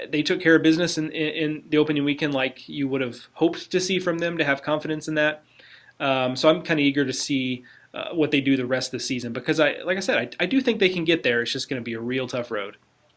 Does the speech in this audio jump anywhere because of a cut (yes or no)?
no